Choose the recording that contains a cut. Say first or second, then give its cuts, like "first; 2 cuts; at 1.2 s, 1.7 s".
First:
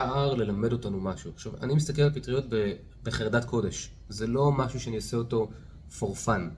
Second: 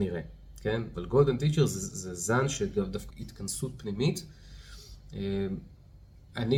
second; 2 cuts; at 0.9 s, 3.1 s